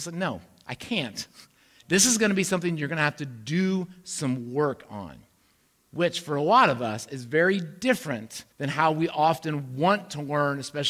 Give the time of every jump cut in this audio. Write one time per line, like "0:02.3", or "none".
0:01.8
0:08.5